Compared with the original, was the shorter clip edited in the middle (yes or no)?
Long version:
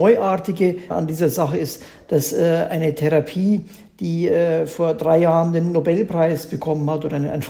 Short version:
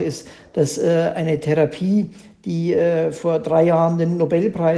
no